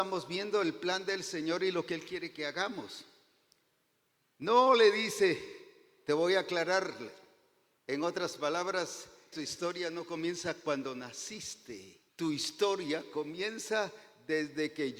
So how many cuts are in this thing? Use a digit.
3